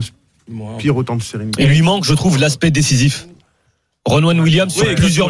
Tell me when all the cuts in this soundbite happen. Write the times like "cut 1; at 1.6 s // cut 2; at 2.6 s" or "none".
none